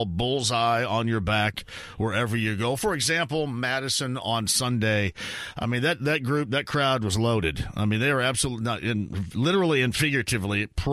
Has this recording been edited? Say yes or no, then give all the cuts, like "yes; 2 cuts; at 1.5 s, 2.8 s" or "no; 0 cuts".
no; 0 cuts